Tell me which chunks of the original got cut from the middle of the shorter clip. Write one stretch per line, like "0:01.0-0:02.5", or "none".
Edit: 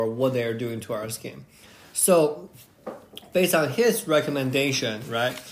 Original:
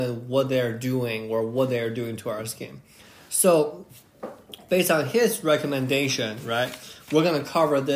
none